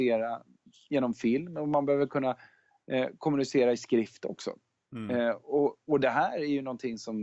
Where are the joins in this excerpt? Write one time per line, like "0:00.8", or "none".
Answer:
none